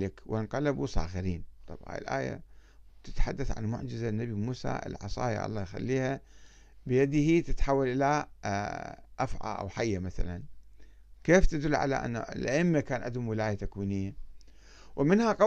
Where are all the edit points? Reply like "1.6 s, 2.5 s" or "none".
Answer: 1.6 s